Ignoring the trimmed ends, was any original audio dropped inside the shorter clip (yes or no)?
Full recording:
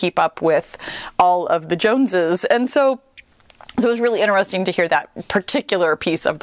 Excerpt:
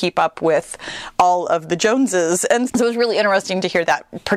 yes